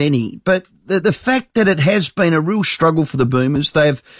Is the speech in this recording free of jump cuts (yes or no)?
yes